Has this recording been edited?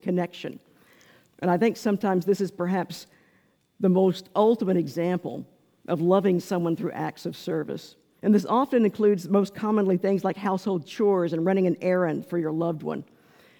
yes; 2 cuts; at 1.2 s, 8.2 s

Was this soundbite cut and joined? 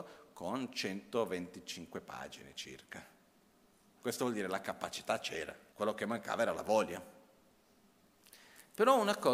yes; 2 cuts; at 4.0 s, 5.7 s

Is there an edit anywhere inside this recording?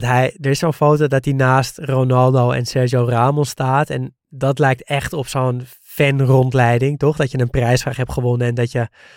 no; 0 cuts

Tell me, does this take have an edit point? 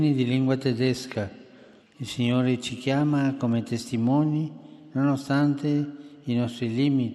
yes; 1 cut; at 1.8 s

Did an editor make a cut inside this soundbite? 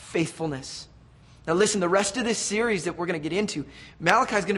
no; 0 cuts

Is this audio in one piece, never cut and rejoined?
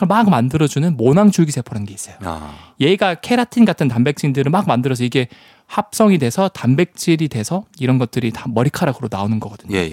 yes; 0 cuts

